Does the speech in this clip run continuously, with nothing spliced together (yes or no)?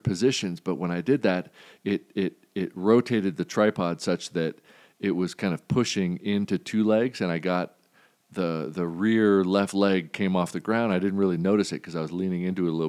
yes